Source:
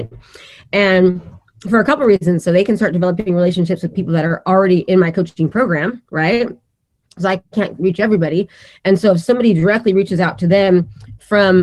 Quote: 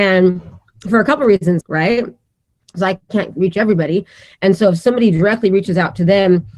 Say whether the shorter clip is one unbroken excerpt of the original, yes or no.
no